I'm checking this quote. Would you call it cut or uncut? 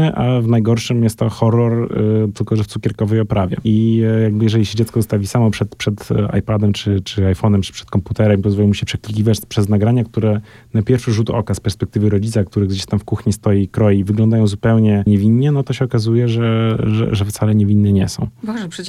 uncut